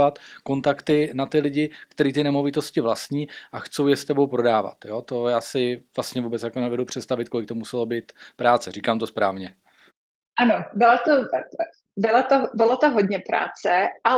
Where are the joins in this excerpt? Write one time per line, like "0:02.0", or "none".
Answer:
none